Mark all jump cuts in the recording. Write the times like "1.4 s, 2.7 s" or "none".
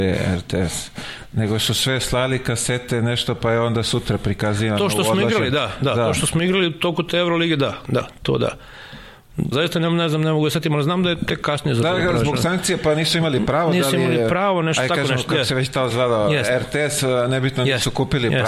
9.5 s